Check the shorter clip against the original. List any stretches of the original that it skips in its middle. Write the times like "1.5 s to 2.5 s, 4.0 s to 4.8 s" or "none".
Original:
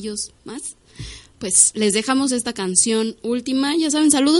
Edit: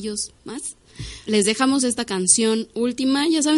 1.2 s to 1.7 s